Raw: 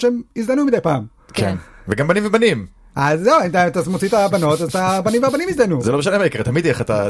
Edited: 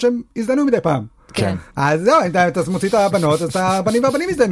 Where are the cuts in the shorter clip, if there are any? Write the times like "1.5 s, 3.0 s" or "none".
1.7 s